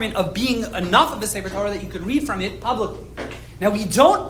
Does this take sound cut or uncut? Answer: uncut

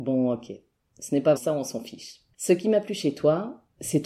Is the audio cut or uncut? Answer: cut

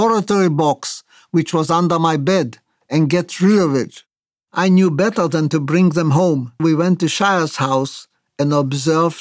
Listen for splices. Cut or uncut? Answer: cut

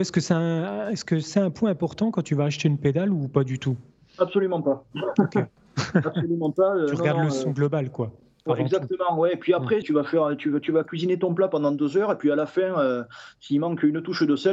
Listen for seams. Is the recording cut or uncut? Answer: cut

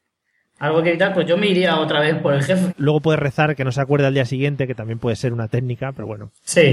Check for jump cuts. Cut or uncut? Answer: cut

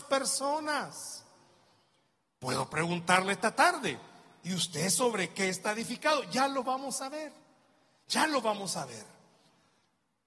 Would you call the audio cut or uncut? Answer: uncut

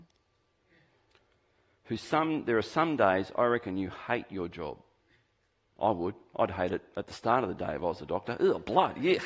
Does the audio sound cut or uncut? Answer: uncut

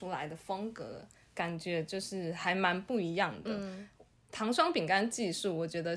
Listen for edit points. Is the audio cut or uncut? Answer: uncut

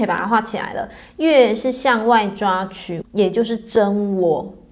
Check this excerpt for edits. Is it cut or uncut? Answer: cut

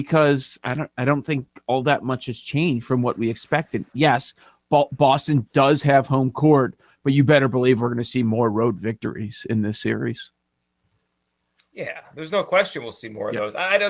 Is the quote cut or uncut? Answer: uncut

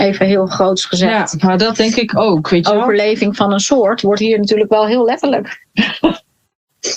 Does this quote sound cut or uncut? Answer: uncut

